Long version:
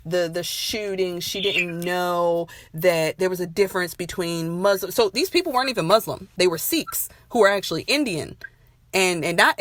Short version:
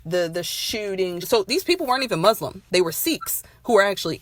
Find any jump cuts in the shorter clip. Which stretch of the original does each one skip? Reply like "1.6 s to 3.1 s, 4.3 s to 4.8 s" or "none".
1.2 s to 4.9 s